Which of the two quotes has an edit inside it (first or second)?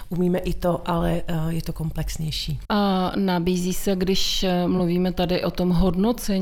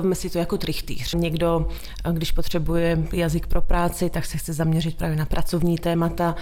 second